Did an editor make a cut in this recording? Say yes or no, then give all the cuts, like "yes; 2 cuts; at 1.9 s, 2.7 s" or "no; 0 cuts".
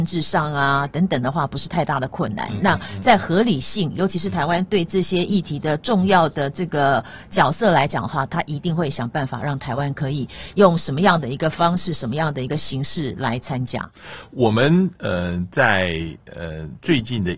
no; 0 cuts